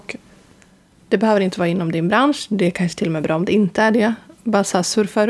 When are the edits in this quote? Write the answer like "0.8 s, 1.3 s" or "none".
none